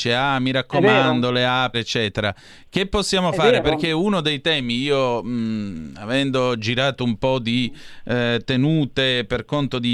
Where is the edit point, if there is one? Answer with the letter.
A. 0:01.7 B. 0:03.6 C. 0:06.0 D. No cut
A